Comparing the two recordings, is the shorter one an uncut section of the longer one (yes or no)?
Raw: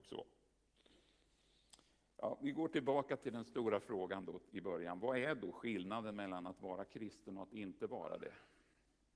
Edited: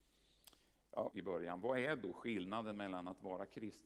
no